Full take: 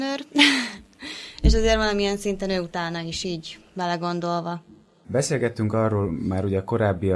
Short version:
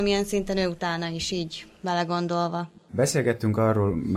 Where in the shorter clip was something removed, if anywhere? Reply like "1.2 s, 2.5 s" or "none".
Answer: 2.8 s

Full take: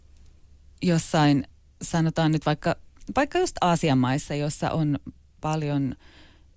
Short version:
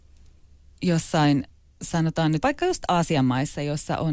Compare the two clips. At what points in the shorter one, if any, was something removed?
2.4 s

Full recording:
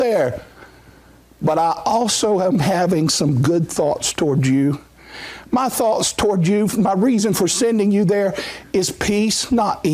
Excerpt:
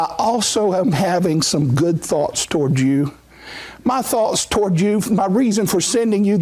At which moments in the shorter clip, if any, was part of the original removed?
none

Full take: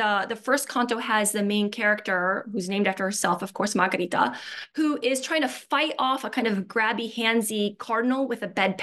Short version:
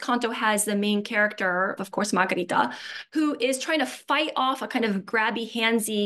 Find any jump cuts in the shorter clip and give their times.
1.8 s

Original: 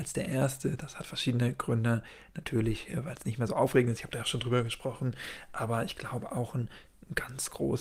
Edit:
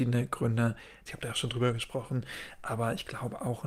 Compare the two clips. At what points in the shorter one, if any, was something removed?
1.1 s

